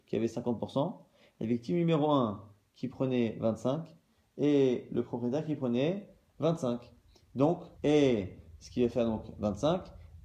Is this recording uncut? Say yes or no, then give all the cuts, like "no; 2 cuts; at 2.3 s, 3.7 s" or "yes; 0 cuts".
no; 1 cut; at 7.7 s